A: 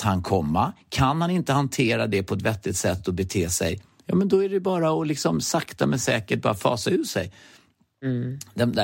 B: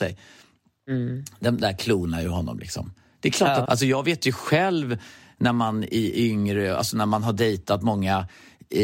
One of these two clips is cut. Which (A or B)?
B